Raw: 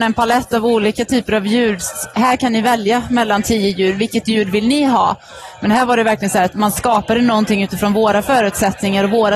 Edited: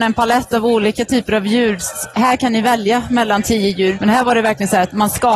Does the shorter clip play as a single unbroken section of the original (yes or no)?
no